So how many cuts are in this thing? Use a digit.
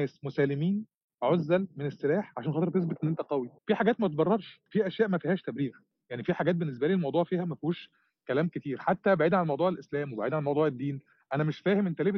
2